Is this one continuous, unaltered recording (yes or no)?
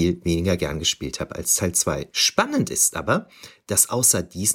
no